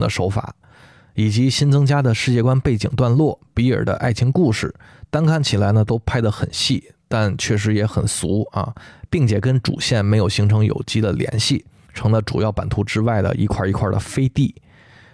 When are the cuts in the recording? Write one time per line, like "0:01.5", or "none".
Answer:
none